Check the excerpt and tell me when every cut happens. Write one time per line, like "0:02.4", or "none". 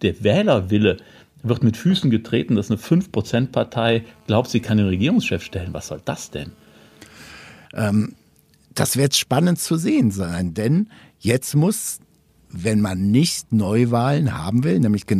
0:07.6